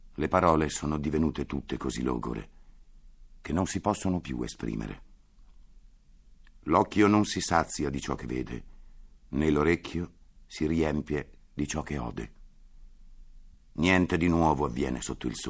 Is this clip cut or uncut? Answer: cut